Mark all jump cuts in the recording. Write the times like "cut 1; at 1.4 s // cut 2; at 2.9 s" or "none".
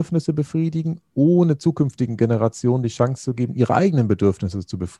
none

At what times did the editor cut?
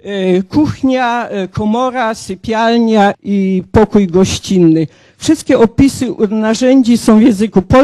cut 1; at 3.1 s

